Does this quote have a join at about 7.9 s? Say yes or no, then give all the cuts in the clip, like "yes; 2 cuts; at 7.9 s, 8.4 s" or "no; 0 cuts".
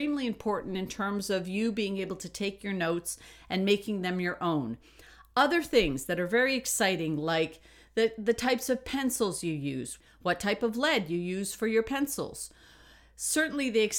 no; 0 cuts